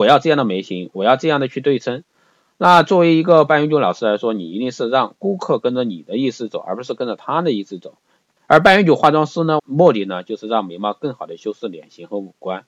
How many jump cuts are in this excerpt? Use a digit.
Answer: 2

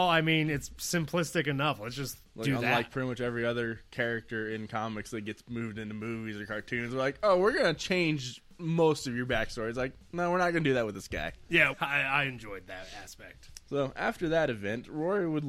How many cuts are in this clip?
1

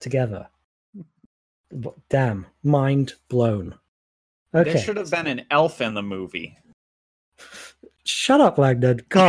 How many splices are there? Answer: 0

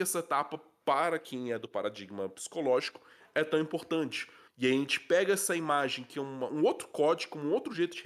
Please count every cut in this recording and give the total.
1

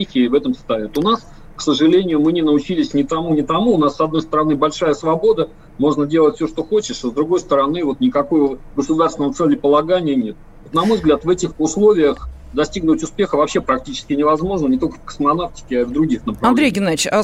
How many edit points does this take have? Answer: 0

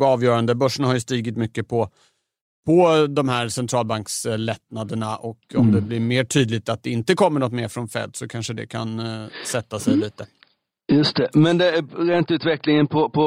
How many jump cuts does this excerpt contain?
0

